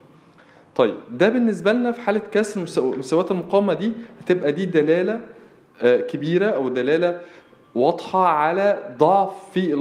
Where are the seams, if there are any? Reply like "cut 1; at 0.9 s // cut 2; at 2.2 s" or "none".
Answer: none